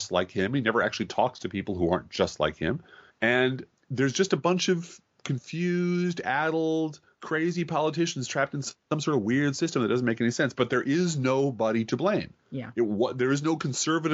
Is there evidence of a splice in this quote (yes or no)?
no